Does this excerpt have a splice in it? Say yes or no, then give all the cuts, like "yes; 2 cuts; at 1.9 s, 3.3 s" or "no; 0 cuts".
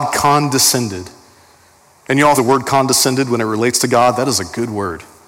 yes; 1 cut; at 2.4 s